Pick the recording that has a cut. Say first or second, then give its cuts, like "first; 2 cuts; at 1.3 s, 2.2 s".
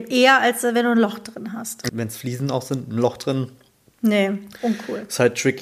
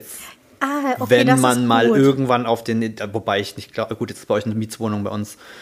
first; 1 cut; at 1.9 s